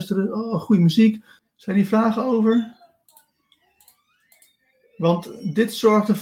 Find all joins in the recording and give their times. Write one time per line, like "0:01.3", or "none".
0:01.4